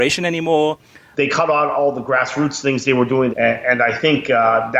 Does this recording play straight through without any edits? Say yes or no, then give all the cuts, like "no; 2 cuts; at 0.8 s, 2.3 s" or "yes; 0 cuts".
no; 2 cuts; at 1.1 s, 3.3 s